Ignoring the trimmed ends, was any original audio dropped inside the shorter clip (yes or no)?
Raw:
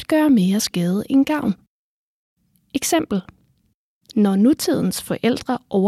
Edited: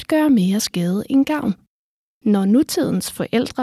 yes